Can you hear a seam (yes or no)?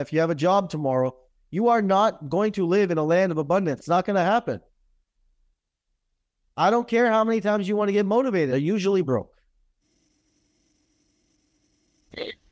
yes